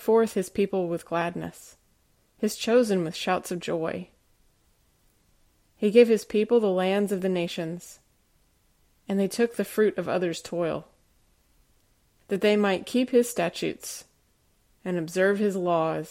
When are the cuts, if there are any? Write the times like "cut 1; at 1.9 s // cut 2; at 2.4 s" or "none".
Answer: none